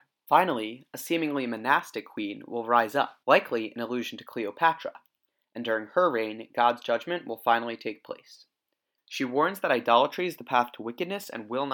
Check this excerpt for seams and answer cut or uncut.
cut